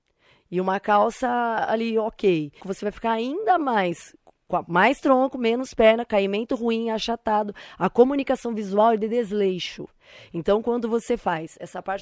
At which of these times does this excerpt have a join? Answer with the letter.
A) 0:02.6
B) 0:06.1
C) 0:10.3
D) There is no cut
A